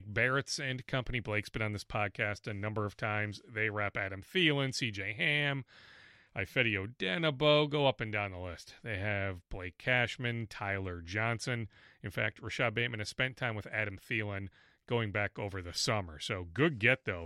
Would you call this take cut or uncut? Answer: uncut